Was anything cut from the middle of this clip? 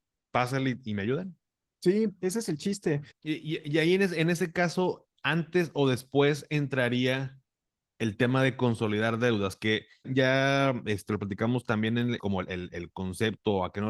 yes; 3 cuts; at 3.1 s, 10.0 s, 12.2 s

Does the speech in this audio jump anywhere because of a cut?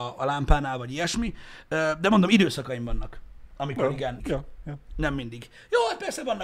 yes; 1 cut; at 4.2 s

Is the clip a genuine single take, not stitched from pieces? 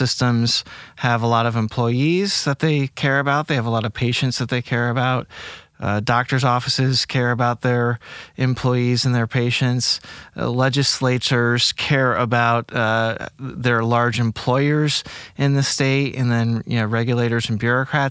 yes; 0 cuts

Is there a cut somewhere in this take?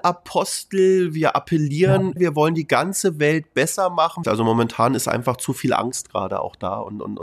yes; 2 cuts; at 2.2 s, 4.2 s

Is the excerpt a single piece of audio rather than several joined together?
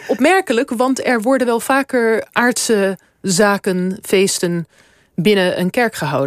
yes; 0 cuts

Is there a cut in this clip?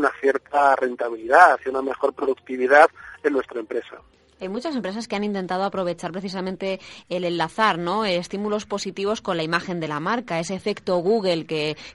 no; 0 cuts

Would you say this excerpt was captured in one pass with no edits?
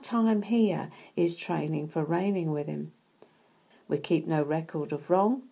no; 1 cut; at 3.7 s

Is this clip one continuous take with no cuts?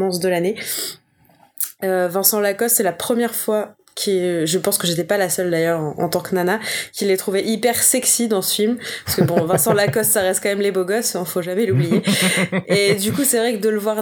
yes; 0 cuts

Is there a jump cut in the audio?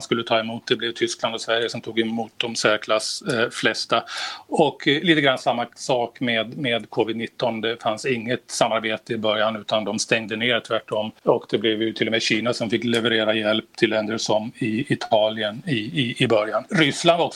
no; 0 cuts

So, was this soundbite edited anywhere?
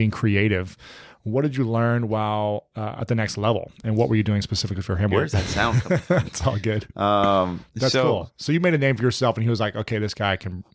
yes; 2 cuts; at 5.1 s, 6.2 s

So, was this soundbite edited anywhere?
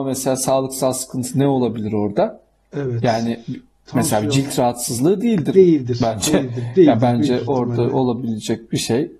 no; 0 cuts

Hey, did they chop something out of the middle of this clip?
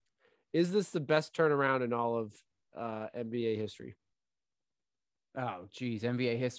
no; 0 cuts

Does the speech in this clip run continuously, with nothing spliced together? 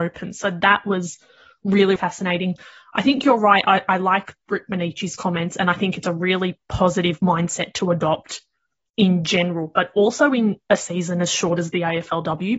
no; 1 cut; at 2.0 s

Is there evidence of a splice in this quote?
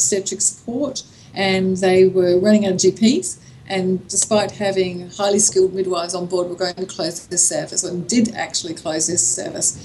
no; 0 cuts

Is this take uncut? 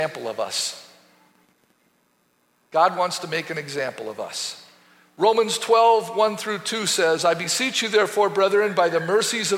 yes; 0 cuts

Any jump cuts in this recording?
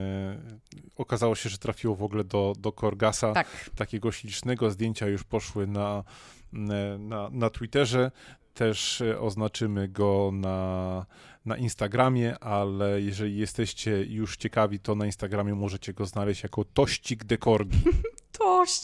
no; 0 cuts

